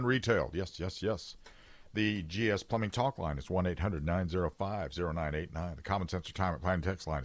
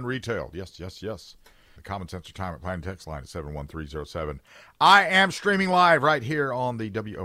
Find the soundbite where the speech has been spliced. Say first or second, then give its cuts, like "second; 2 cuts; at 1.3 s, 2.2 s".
second; 1 cut; at 1.8 s